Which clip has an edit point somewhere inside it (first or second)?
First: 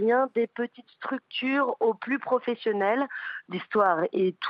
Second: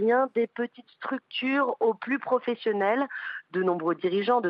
first